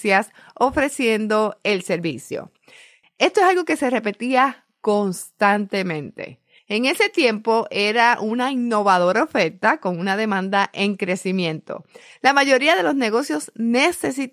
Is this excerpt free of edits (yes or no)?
no